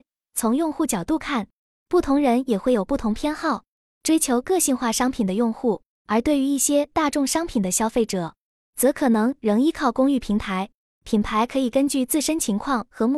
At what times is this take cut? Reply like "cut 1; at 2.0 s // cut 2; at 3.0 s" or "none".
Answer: cut 1; at 6.0 s // cut 2; at 10.9 s